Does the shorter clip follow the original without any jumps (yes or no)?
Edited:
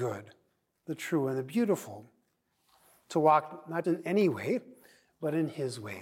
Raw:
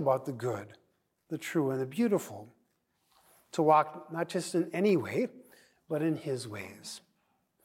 no